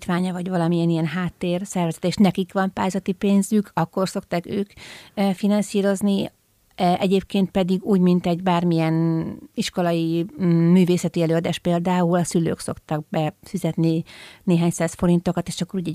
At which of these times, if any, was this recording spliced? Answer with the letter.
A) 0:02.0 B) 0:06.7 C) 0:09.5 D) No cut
C